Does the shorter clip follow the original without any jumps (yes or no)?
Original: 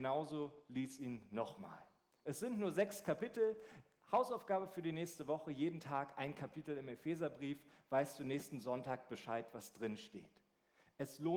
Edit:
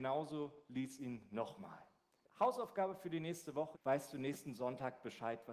no